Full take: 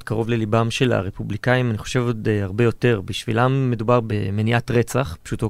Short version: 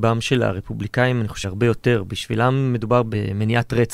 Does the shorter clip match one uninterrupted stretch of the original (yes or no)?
no